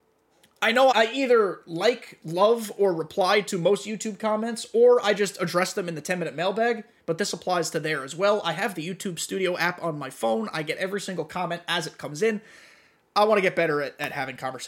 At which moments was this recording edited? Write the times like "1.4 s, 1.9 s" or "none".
0.9 s